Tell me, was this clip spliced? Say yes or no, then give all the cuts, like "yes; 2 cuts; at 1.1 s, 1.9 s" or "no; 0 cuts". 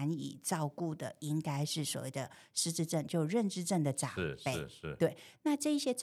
no; 0 cuts